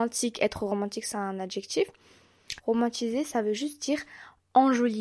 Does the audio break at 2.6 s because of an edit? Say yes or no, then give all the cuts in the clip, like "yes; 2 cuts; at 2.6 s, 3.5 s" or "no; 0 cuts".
yes; 1 cut; at 2.6 s